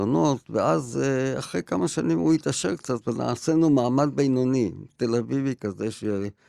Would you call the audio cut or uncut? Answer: uncut